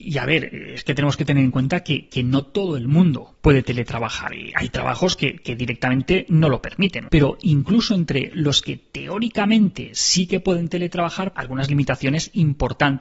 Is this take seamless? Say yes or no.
no